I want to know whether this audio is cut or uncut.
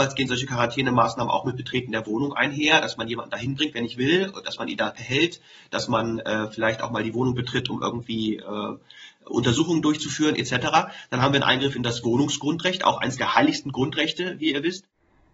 uncut